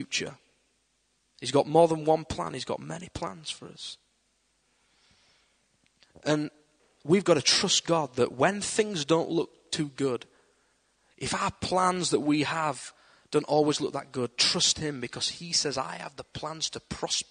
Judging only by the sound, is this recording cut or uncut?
uncut